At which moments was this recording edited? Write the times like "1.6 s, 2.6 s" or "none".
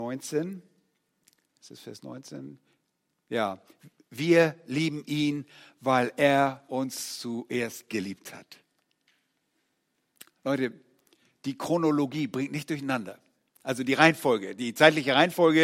none